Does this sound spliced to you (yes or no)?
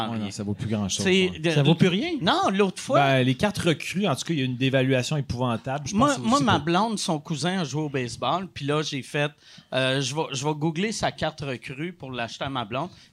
no